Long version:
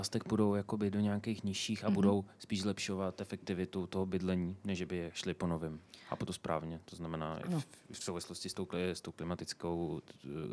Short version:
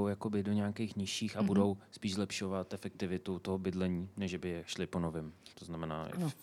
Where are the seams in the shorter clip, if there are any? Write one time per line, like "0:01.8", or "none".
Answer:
0:05.5